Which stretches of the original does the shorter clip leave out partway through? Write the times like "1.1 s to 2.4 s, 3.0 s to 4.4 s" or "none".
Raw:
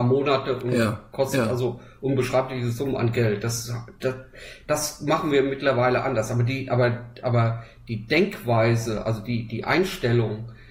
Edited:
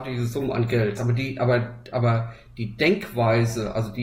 3.4 s to 6.3 s